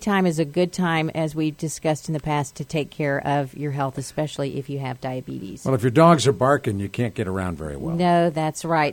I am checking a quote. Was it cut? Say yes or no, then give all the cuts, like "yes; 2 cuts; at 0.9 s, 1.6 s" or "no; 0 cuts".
no; 0 cuts